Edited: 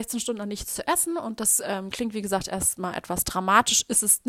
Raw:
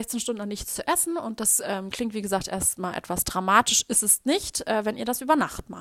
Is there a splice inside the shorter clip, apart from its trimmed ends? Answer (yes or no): no